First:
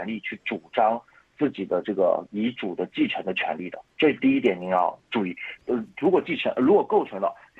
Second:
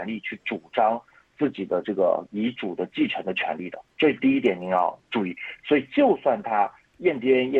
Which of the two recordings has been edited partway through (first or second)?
first